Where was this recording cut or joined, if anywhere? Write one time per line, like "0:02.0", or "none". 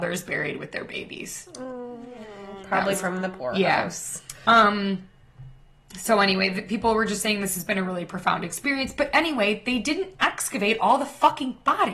none